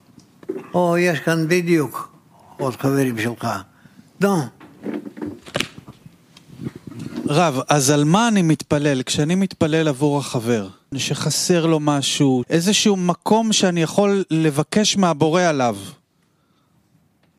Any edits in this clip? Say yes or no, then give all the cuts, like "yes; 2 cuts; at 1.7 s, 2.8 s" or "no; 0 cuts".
yes; 2 cuts; at 10.9 s, 12.4 s